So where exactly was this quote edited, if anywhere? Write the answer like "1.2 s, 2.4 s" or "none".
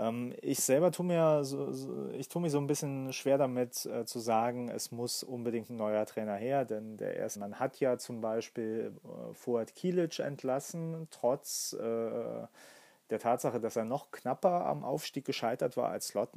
7.4 s

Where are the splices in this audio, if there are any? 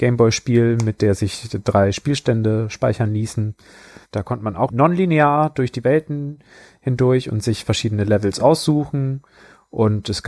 4.0 s

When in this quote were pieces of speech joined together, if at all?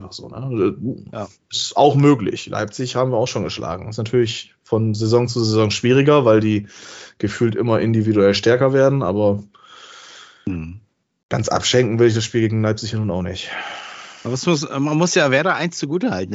none

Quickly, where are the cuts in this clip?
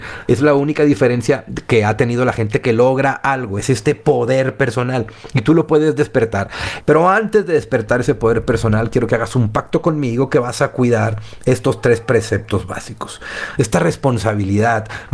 6.8 s

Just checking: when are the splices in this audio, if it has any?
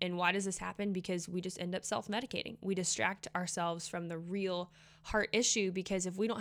none

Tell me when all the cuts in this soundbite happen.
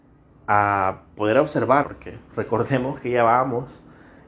1.8 s

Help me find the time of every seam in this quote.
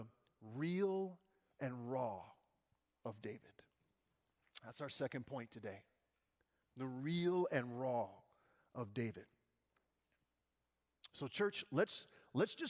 none

